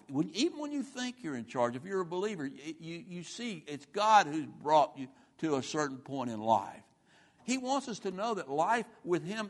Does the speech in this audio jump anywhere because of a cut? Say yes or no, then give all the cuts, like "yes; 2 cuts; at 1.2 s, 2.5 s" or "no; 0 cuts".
yes; 1 cut; at 7.4 s